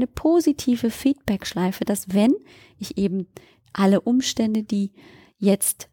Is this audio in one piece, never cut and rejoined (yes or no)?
yes